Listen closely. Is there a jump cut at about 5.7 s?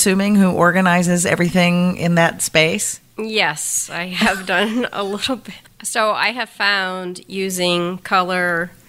yes; 1 cut; at 5.7 s

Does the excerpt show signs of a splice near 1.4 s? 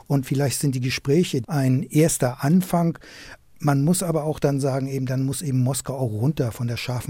yes; 1 cut; at 1.4 s

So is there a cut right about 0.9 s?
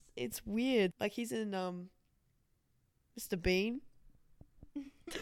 yes; 1 cut; at 0.9 s

